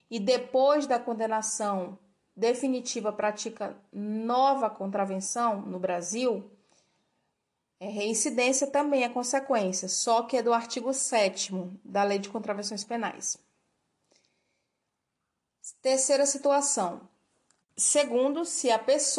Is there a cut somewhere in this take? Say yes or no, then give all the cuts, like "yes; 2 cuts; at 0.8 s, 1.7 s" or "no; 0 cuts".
yes; 1 cut; at 17.6 s